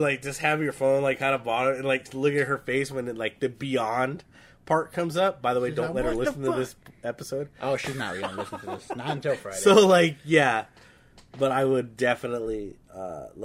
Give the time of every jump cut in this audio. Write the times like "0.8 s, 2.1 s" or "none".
none